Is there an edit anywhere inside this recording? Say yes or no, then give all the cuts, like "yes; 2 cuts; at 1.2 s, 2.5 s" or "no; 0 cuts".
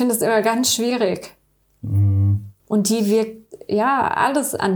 yes; 1 cut; at 2.6 s